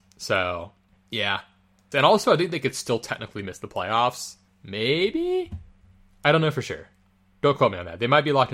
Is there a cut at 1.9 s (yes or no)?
yes